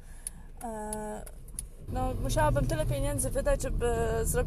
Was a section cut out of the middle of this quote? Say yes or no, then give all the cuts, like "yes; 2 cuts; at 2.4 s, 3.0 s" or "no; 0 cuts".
yes; 1 cut; at 1.9 s